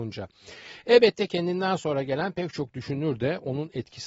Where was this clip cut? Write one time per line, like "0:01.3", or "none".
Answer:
none